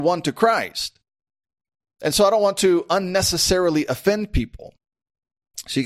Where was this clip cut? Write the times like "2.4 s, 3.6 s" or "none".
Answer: none